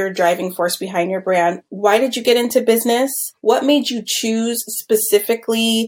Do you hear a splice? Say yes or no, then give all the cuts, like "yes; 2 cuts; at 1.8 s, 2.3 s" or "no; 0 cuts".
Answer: no; 0 cuts